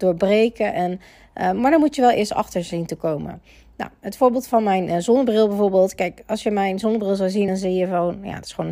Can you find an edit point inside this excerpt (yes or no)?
no